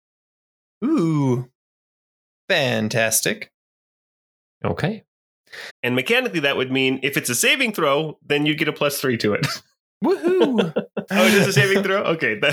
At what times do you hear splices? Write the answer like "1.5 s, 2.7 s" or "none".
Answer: 5.7 s, 11.1 s